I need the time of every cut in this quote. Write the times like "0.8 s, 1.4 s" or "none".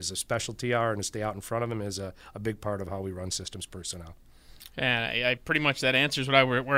none